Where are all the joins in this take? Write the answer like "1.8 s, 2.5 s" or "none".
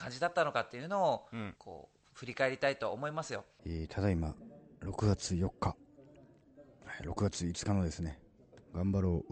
1.6 s, 3.6 s

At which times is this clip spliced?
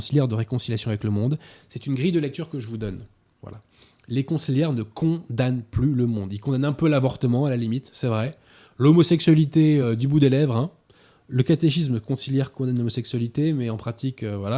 none

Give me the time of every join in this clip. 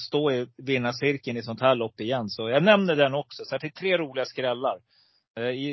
none

